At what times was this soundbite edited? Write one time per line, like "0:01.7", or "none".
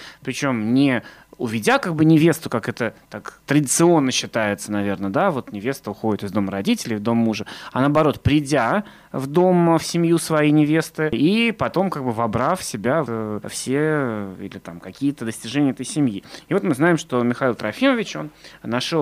0:13.1